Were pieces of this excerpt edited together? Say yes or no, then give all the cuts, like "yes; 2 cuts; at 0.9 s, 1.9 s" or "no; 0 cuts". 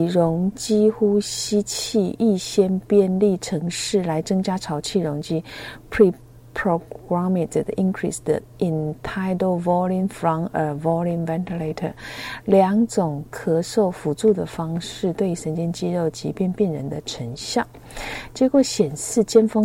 no; 0 cuts